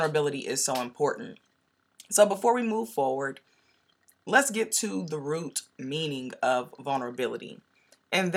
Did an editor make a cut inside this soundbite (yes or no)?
no